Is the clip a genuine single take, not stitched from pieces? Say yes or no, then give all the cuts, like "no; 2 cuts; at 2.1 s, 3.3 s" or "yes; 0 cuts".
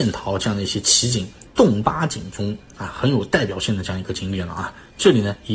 no; 1 cut; at 1.5 s